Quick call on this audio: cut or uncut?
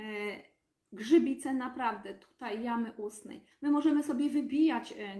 cut